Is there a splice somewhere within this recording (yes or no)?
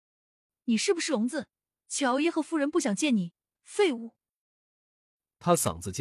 yes